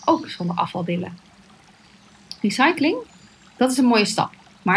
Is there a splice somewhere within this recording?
no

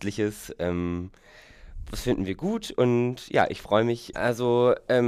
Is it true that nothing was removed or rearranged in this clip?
no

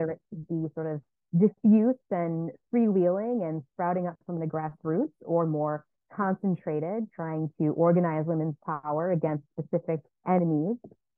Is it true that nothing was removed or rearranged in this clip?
no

